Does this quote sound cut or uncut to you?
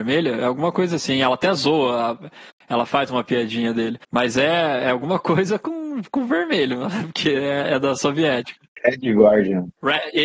cut